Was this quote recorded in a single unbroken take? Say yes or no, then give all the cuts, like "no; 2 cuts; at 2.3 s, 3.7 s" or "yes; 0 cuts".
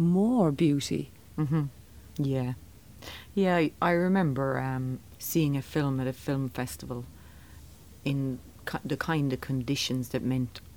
no; 1 cut; at 5.2 s